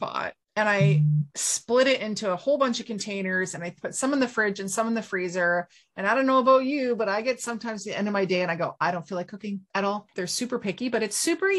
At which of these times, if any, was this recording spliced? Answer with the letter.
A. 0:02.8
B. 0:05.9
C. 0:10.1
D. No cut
C